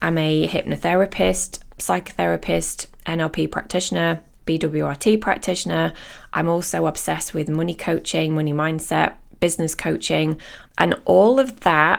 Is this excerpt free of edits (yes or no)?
no